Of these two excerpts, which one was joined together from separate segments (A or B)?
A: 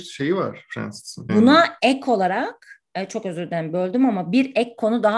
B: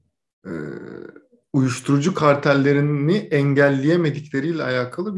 A